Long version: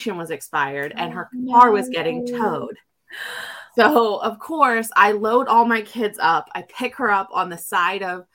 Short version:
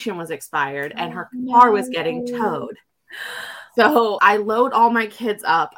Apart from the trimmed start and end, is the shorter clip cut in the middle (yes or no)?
yes